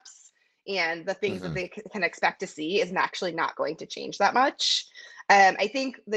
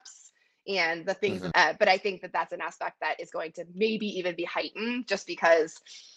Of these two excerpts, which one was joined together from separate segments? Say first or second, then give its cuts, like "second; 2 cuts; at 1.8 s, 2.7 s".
second; 1 cut; at 1.5 s